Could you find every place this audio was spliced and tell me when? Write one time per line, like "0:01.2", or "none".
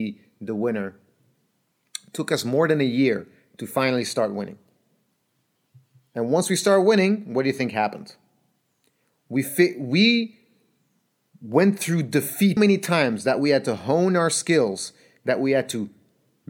0:12.6